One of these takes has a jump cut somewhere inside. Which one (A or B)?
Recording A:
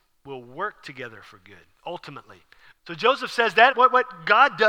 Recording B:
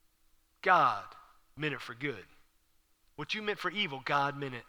A